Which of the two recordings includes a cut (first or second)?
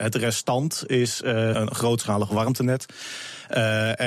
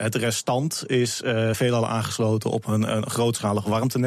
first